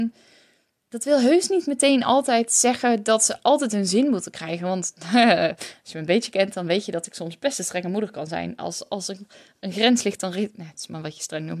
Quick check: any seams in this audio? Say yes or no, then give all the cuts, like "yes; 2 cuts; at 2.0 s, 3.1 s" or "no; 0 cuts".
no; 0 cuts